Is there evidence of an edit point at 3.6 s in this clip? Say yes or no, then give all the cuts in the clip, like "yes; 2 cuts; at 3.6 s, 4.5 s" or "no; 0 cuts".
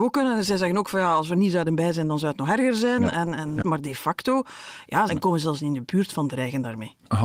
yes; 2 cuts; at 3.6 s, 5.1 s